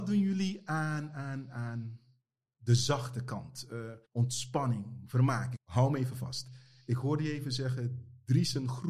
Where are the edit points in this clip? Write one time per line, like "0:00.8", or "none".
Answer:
0:04.0
0:05.5